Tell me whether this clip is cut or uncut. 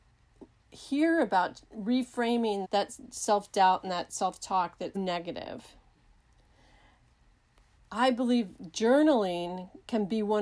cut